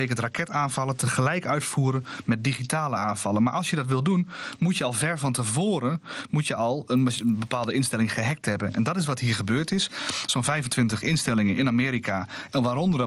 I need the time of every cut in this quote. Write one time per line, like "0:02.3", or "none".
none